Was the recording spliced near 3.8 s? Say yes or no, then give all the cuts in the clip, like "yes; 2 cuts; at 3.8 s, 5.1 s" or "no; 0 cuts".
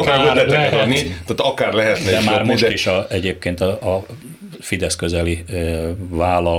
yes; 1 cut; at 3.8 s